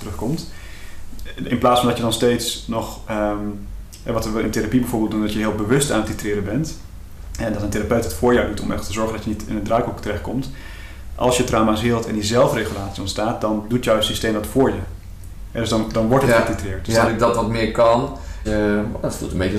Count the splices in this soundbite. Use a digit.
2